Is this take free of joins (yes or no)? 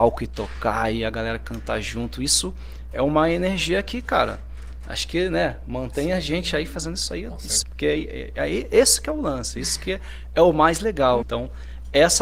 no